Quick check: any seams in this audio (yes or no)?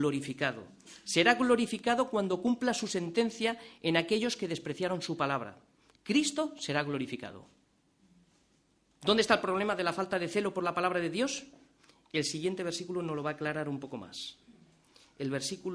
no